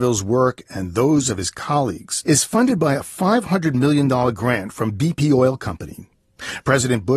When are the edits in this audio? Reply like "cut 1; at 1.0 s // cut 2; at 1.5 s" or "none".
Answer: cut 1; at 2.2 s